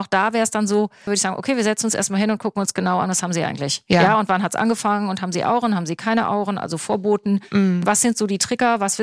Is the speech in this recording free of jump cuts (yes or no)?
no